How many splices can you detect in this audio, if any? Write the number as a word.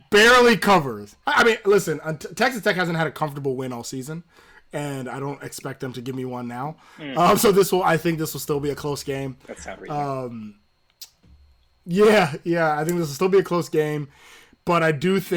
one